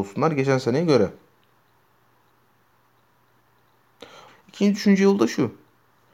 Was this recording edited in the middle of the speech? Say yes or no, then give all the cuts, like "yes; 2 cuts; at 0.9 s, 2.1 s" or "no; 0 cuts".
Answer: yes; 1 cut; at 4.3 s